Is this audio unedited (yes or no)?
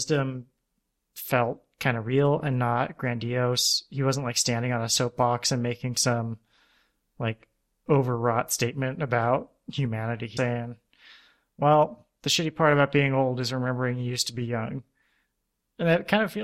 no